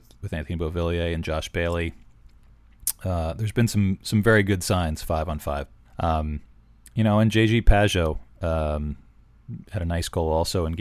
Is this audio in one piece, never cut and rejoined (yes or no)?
no